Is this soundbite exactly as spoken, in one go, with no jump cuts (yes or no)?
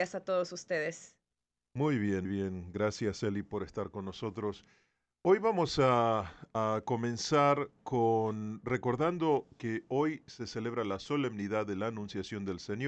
no